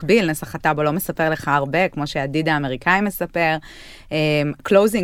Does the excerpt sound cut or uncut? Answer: uncut